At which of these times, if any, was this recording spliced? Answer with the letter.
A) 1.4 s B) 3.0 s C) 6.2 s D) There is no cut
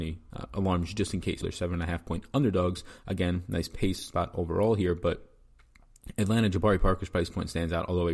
A